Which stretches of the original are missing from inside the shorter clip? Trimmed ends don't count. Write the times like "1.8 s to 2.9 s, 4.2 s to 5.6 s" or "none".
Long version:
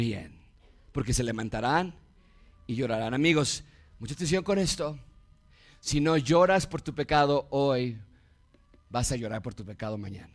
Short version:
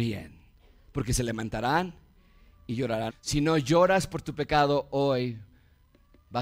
3.1 s to 5.7 s

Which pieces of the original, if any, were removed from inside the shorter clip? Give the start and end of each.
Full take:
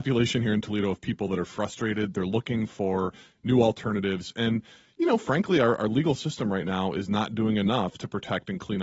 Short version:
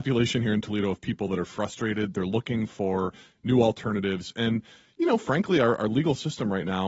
none

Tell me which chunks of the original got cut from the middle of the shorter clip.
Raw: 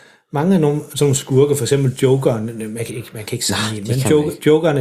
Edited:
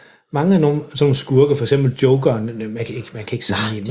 none

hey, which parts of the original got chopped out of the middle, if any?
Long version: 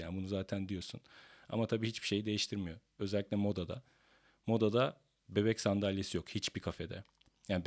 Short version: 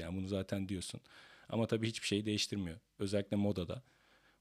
none

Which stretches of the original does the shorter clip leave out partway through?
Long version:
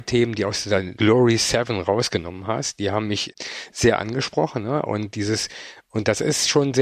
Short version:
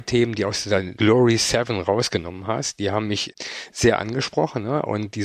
none

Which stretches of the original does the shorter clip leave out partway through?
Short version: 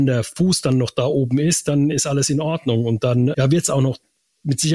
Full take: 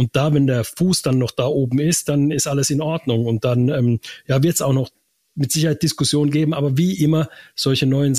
3.7 s to 4.2 s

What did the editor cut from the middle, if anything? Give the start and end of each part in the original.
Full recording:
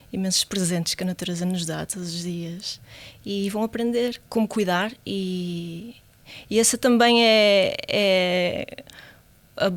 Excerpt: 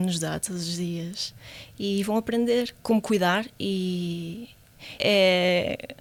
6.4 s to 7.9 s

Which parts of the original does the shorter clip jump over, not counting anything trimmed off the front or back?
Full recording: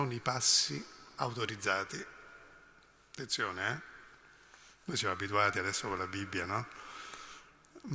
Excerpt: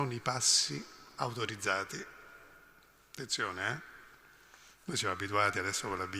none

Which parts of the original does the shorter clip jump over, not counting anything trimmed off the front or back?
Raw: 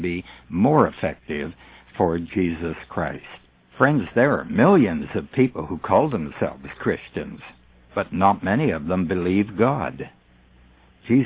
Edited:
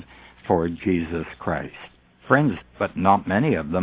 4.1 s to 7.8 s

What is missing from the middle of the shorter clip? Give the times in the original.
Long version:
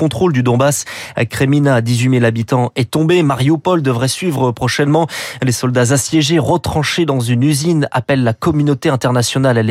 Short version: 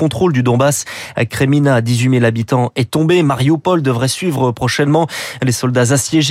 none

